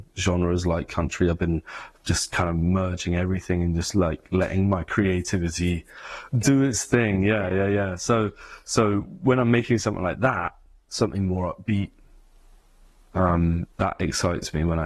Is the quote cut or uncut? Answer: cut